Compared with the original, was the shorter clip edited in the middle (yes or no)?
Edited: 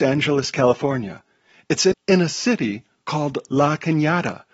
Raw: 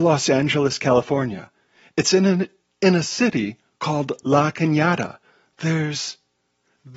yes